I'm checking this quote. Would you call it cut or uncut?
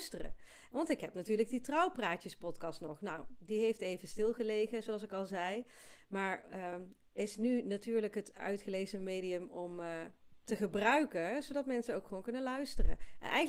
uncut